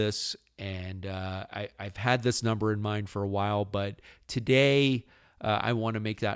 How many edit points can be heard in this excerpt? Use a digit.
0